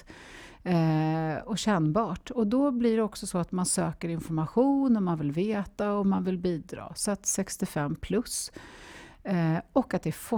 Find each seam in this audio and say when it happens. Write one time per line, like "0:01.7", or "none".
none